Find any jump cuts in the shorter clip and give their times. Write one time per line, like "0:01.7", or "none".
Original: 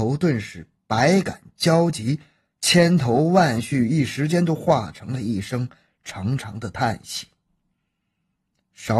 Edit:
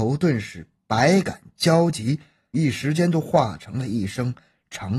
0:02.5